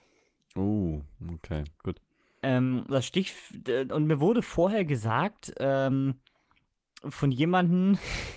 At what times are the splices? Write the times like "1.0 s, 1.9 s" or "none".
1.8 s